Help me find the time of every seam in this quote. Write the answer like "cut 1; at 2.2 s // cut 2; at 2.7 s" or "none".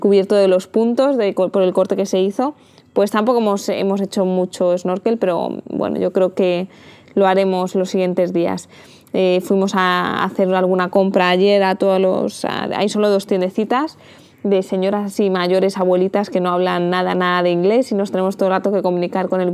cut 1; at 9.0 s